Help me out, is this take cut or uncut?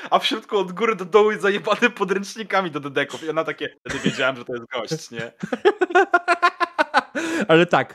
cut